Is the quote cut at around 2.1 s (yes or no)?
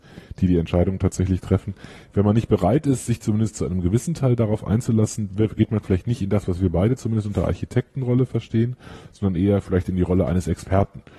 no